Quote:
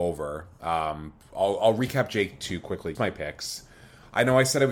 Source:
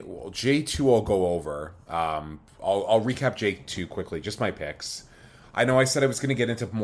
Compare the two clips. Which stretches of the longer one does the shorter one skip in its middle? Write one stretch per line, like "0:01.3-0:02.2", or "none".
0:04.2-0:04.4